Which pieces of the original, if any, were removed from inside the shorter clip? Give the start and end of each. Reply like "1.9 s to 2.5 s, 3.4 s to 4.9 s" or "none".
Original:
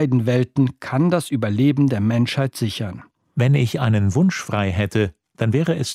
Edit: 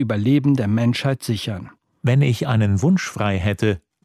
none